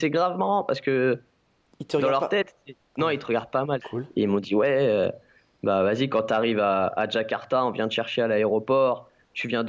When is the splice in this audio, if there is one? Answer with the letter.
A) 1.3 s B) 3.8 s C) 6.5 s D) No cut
B